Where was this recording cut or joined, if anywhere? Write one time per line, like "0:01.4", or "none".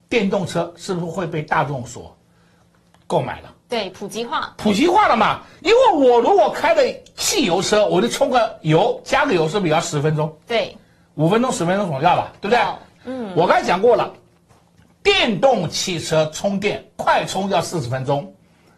0:13.0